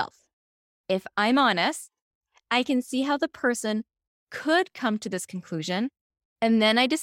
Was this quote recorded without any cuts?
yes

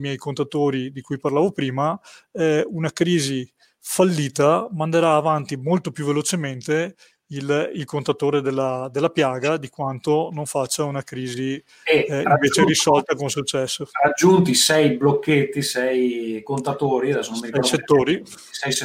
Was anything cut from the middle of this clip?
no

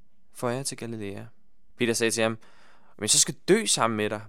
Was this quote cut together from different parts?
yes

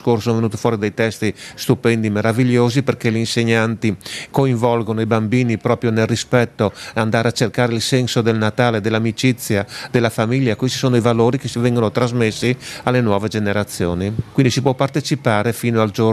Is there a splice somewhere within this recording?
yes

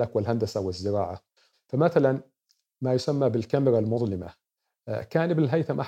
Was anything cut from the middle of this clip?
yes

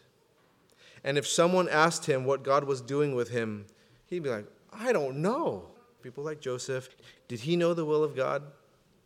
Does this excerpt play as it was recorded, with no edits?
no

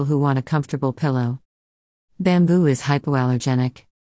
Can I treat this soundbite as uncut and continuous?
yes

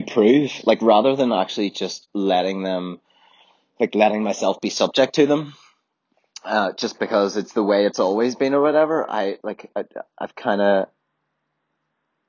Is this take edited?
no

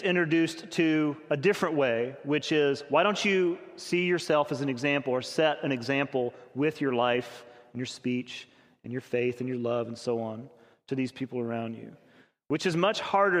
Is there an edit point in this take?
no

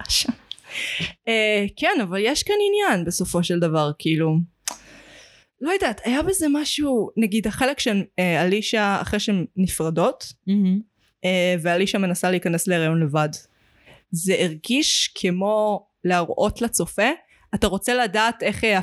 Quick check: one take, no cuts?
yes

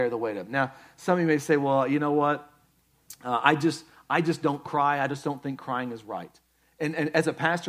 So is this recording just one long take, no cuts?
yes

